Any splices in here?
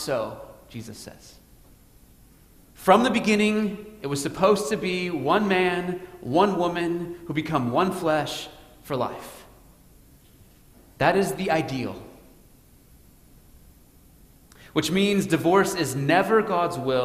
no; 0 cuts

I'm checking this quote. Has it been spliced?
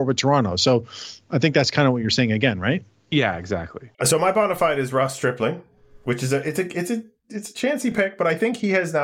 yes; 1 cut; at 3.9 s

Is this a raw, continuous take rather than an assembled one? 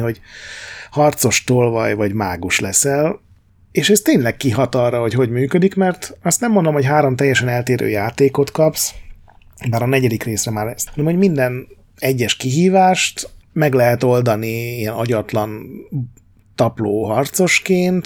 no; 2 cuts; at 10.9 s, 13.4 s

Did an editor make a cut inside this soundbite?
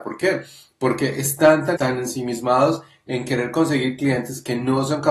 yes; 1 cut; at 1.8 s

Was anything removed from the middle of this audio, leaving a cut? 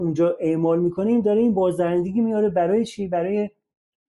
no; 0 cuts

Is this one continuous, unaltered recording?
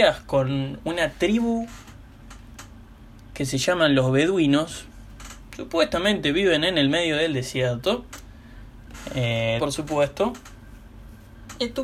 no; 1 cut; at 9.6 s

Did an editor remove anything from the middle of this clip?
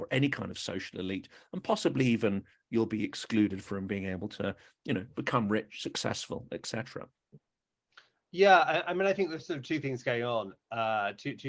no; 0 cuts

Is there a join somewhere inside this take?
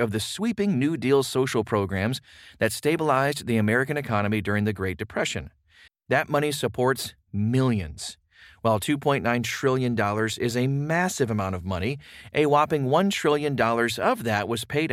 yes; 1 cut; at 5.9 s

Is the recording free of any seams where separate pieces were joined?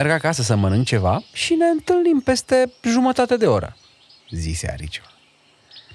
no; 1 cut; at 4.2 s

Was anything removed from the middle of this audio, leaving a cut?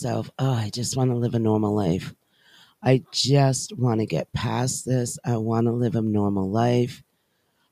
no; 0 cuts

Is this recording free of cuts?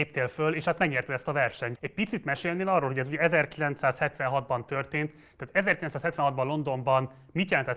no; 1 cut; at 1.8 s

